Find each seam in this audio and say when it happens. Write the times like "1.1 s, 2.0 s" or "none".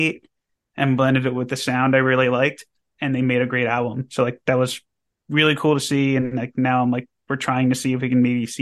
none